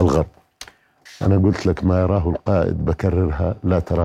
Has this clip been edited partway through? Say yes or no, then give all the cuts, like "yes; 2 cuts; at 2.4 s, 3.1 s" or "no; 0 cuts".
yes; 1 cut; at 1.1 s